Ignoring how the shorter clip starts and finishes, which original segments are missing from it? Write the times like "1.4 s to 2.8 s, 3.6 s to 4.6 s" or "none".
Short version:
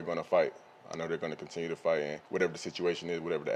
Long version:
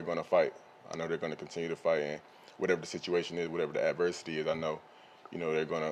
2.3 s to 2.5 s